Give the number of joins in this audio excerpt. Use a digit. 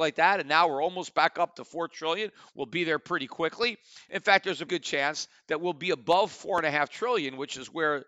1